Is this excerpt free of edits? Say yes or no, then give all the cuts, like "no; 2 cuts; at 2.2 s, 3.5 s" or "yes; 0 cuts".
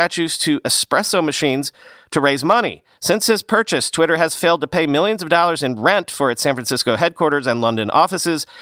no; 1 cut; at 2.9 s